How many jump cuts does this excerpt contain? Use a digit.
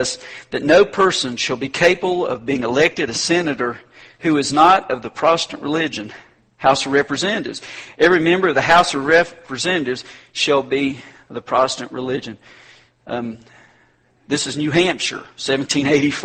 0